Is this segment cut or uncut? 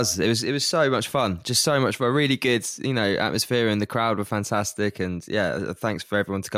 uncut